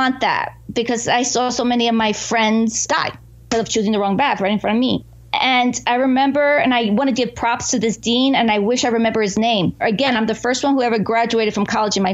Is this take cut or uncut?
cut